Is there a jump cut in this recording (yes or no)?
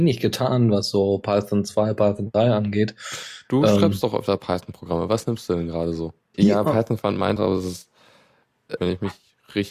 yes